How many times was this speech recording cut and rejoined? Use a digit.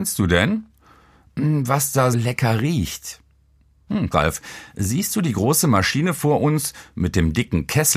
2